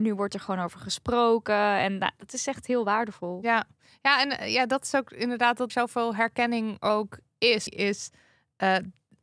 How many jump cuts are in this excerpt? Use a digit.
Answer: 2